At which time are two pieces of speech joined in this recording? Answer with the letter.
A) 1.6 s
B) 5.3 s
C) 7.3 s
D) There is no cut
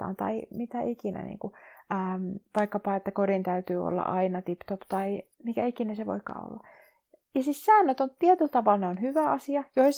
B